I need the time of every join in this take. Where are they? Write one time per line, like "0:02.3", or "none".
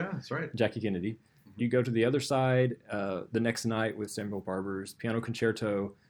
0:01.6